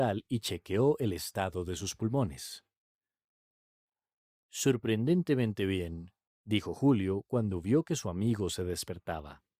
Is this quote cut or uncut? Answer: cut